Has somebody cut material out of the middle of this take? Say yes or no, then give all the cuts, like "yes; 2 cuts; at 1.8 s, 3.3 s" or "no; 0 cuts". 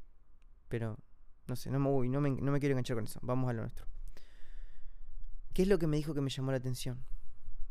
no; 0 cuts